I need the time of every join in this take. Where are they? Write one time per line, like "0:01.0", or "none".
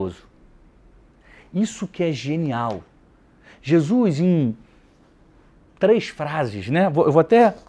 none